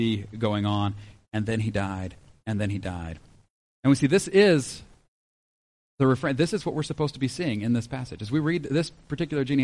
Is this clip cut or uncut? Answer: cut